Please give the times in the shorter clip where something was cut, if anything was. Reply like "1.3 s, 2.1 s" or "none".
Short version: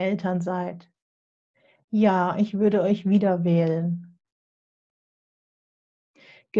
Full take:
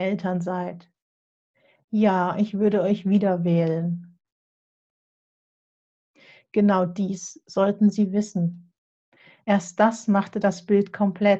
none